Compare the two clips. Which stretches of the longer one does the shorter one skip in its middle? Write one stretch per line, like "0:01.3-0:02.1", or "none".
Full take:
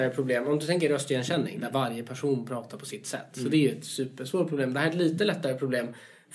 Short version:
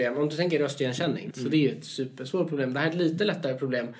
0:01.6-0:03.3